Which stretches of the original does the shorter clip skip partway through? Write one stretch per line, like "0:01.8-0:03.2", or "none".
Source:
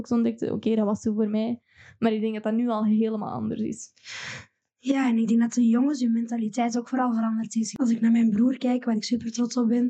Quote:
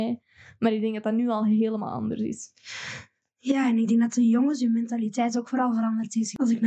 none

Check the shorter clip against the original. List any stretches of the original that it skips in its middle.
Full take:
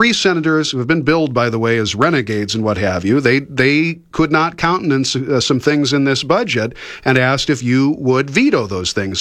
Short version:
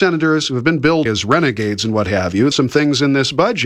0:01.3-0:01.8
0:03.2-0:05.4

